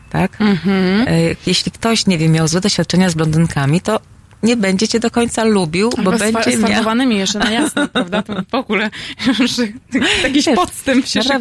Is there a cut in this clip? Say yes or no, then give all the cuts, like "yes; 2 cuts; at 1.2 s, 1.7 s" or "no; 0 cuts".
no; 0 cuts